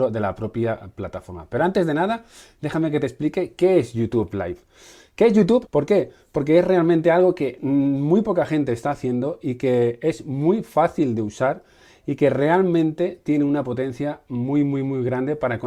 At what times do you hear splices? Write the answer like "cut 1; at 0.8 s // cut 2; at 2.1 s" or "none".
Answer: cut 1; at 5.7 s